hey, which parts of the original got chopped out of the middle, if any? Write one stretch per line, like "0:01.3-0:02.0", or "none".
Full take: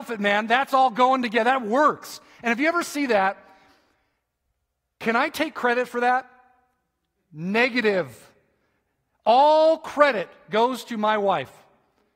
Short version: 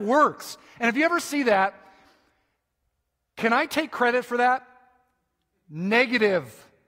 none